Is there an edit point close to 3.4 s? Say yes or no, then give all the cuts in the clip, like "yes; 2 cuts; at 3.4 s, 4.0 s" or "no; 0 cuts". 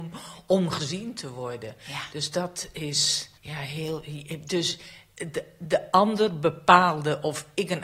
yes; 1 cut; at 3.4 s